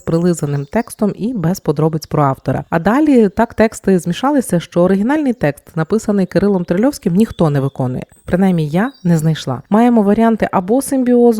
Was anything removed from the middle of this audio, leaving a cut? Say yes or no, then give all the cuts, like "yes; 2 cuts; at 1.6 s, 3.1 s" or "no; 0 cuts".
no; 0 cuts